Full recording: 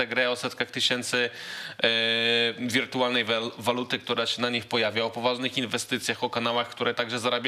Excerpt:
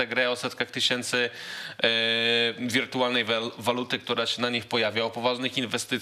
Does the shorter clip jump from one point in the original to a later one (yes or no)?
no